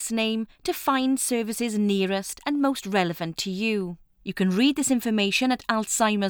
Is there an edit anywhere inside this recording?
yes; 1 cut; at 4.1 s

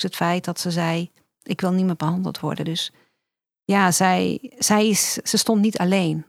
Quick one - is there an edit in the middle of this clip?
no; 0 cuts

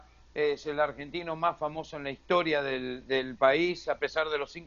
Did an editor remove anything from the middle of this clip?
no; 0 cuts

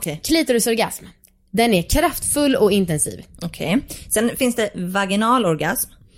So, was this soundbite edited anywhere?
yes; 1 cut; at 3.4 s

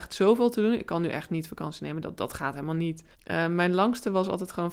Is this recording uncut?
no; 1 cut; at 3.1 s

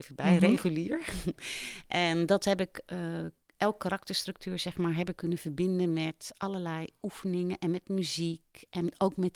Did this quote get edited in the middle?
no; 0 cuts

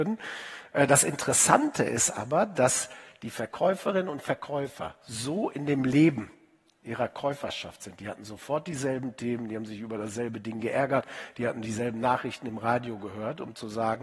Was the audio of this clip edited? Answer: no; 0 cuts

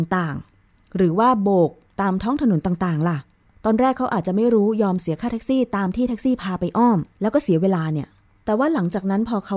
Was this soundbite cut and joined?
yes; 1 cut; at 7.1 s

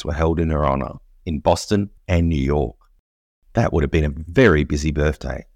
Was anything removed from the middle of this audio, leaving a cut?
yes; 1 cut; at 2.0 s

